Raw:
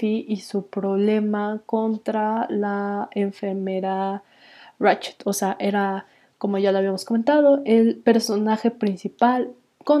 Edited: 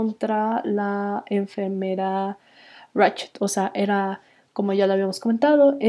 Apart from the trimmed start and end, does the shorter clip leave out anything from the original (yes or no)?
no